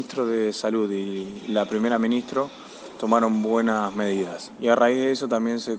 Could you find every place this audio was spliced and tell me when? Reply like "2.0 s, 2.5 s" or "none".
4.6 s